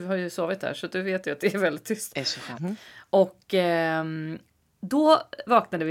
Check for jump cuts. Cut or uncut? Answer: cut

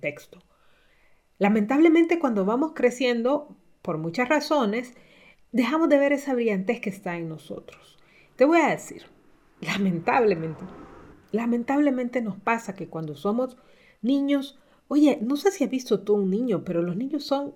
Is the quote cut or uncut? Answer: uncut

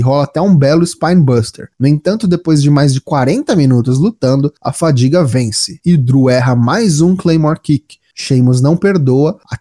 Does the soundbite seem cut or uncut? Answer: uncut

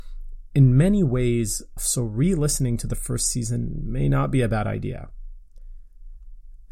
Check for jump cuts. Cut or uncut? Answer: cut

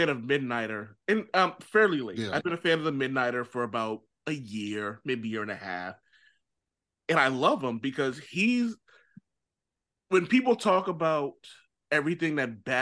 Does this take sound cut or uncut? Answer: uncut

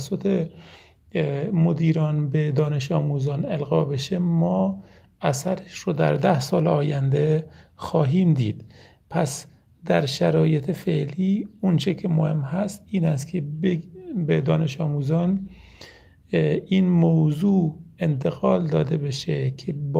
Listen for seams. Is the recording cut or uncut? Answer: uncut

